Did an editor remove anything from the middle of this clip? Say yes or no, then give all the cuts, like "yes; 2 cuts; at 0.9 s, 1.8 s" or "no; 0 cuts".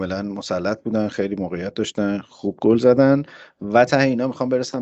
no; 0 cuts